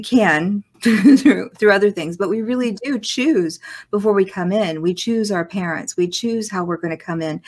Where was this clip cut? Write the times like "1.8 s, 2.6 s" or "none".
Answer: none